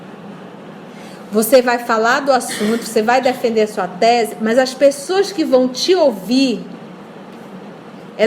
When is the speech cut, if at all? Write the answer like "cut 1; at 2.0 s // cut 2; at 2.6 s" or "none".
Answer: none

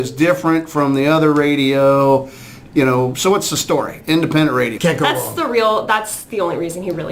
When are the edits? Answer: cut 1; at 4.8 s

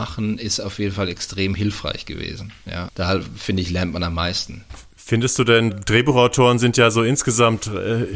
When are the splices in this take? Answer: cut 1; at 2.9 s // cut 2; at 5.7 s

